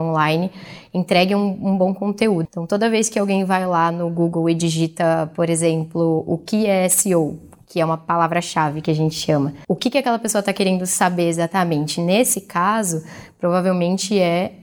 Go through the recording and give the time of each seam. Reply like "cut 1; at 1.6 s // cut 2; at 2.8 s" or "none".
cut 1; at 2.5 s